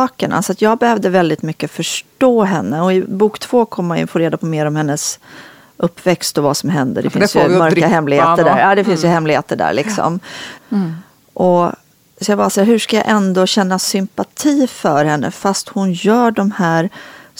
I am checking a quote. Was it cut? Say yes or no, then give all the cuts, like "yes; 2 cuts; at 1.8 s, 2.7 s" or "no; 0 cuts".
yes; 1 cut; at 10.6 s